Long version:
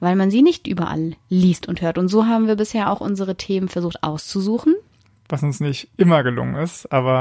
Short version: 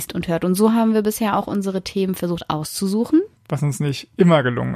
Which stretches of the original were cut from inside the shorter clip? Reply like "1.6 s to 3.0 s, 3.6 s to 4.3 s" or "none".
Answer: 4.9 s to 5.2 s